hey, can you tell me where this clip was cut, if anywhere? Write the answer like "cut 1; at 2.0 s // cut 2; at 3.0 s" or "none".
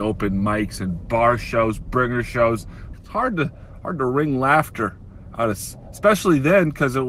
cut 1; at 2.9 s